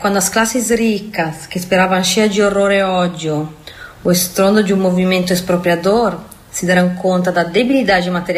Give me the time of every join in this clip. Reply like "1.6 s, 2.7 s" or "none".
none

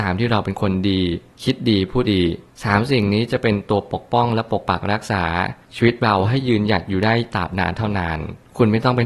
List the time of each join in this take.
2.0 s

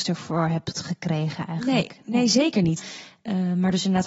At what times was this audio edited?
2.8 s

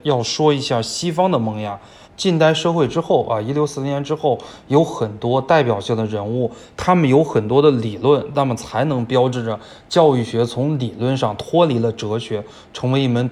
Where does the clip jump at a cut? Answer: 2.0 s

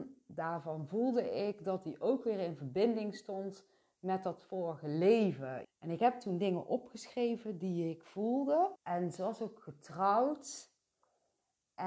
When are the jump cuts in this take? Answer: 5.6 s, 8.8 s

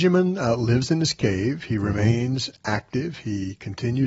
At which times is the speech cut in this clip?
none

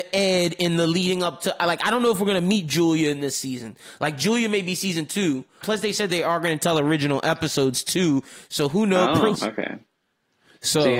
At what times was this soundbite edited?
5.6 s, 9.3 s

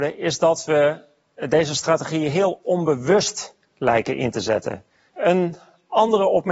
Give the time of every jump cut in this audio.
5.1 s

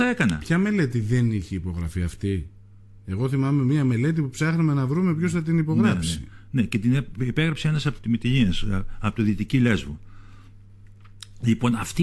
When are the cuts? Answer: 8.0 s

